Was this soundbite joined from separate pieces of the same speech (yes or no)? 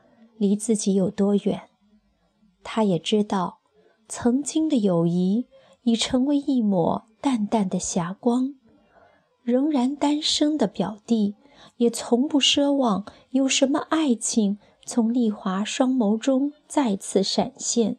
no